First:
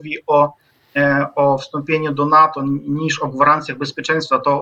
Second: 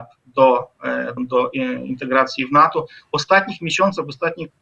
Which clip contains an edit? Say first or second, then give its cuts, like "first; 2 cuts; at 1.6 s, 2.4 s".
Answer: second; 1 cut; at 1.2 s